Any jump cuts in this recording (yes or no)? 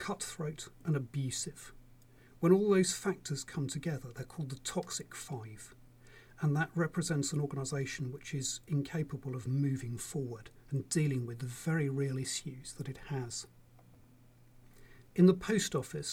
no